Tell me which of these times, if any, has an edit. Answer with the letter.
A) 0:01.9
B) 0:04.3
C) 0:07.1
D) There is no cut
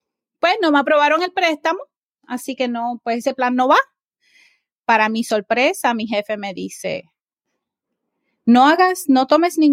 D